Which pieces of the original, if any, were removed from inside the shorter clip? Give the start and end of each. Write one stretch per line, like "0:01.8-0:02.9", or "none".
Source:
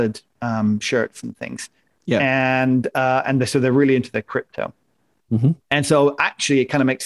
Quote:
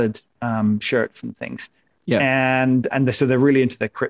0:02.9-0:03.2